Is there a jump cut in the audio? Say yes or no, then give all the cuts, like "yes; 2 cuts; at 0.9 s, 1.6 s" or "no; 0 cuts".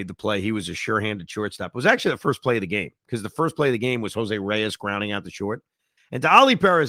yes; 1 cut; at 6.0 s